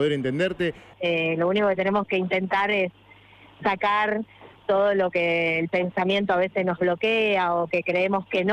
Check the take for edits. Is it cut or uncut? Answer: cut